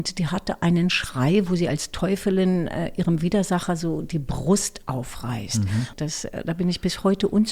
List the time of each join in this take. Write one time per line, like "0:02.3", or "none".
0:05.9